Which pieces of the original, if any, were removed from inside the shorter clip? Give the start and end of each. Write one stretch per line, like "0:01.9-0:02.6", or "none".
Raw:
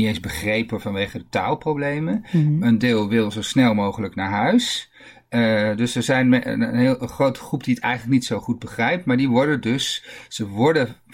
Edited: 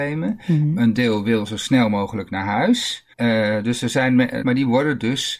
0:05.0-0:05.3
0:06.6-0:09.0

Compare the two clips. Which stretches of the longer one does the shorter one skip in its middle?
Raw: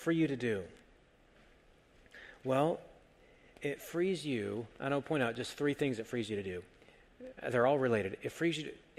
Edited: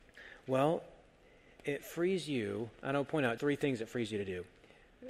0:05.3-0:05.6

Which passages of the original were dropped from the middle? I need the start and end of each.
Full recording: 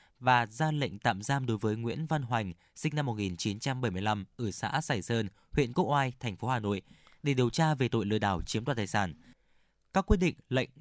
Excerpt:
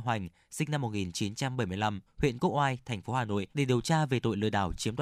0:04.3-0:05.4
0:06.8-0:07.2

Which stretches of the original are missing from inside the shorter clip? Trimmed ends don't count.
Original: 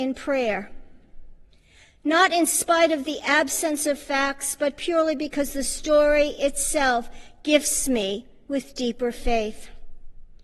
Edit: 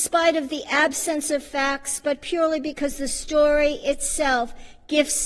none

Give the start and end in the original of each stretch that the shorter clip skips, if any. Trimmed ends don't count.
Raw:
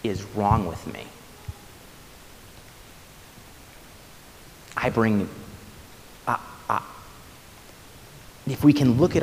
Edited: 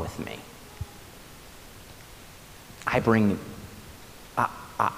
0:03.4-0:04.7

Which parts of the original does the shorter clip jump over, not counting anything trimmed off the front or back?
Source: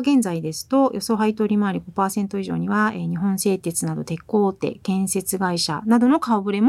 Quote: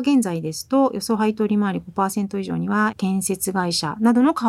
0:02.9-0:04.8

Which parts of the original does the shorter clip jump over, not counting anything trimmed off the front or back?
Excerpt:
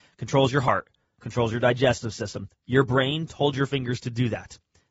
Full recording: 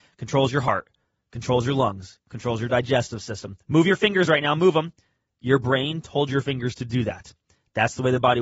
0:01.2-0:02.2
0:03.6-0:05.3

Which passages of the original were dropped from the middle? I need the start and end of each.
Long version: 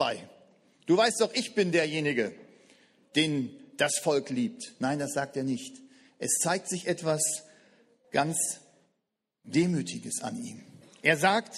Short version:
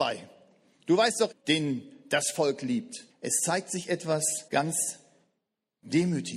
0:01.3-0:03.0
0:04.8-0:06.1
0:07.4-0:08.1

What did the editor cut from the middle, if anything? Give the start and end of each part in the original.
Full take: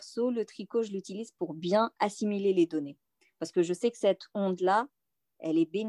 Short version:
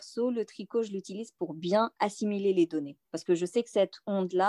0:03.0-0:03.3

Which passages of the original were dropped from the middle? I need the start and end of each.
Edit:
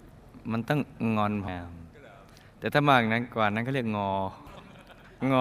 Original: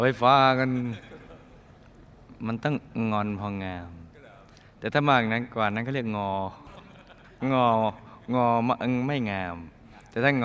0:03.4-0:03.7

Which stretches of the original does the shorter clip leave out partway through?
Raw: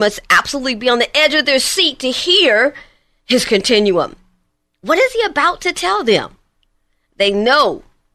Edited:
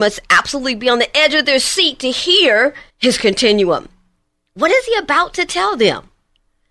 0:02.9-0:03.2

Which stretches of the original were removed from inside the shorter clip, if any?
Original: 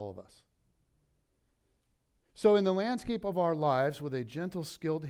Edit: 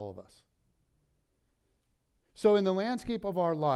none

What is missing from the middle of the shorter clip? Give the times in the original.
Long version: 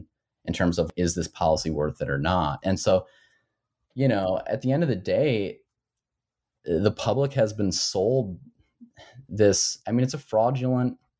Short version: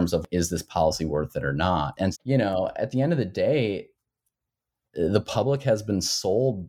0:02.8-0:03.8

